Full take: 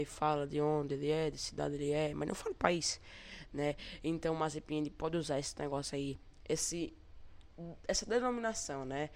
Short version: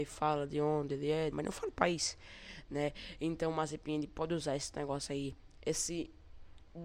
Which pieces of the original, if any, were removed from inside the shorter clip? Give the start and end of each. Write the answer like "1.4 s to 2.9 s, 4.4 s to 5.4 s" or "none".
1.3 s to 2.1 s